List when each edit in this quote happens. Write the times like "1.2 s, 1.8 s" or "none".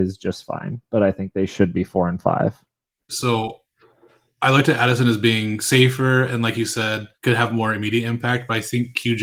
3.1 s, 7.1 s